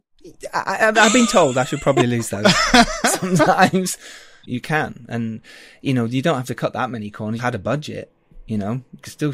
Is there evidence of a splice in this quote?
yes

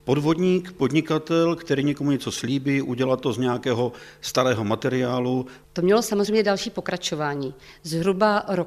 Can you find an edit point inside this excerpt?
yes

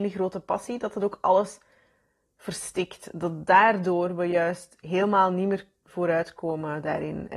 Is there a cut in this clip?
no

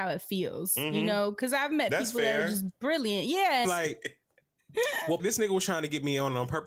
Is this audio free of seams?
no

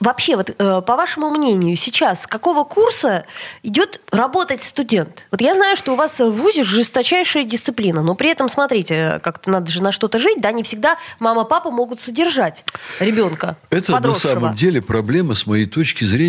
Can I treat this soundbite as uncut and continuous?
yes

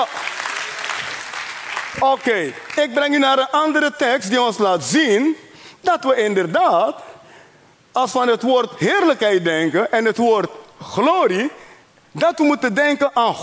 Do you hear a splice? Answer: no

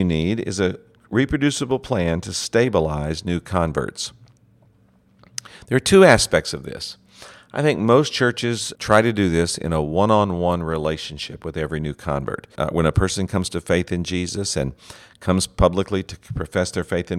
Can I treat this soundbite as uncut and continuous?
no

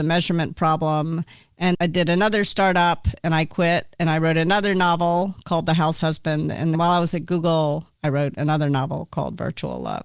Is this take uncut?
no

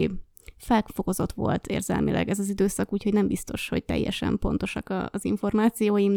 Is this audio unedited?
yes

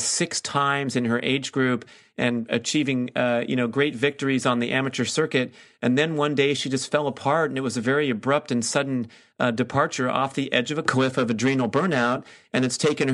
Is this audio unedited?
yes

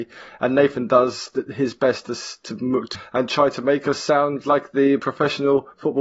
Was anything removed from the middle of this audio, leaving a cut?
yes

